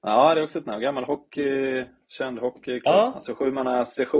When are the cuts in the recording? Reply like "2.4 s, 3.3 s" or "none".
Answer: 3.1 s